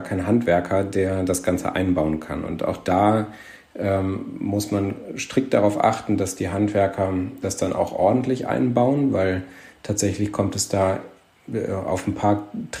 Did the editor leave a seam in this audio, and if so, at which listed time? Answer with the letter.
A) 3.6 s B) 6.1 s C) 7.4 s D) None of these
C